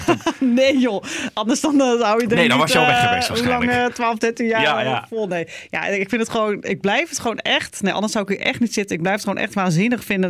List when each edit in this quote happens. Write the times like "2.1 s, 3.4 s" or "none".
none